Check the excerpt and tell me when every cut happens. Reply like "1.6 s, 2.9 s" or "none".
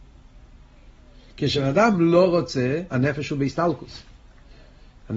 2.9 s